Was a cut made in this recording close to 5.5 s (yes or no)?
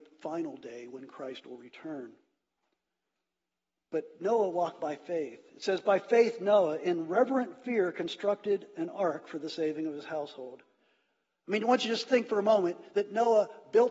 no